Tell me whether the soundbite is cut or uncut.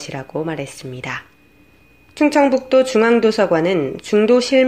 uncut